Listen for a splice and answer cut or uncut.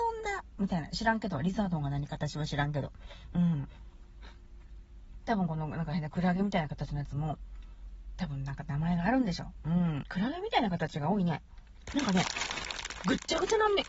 cut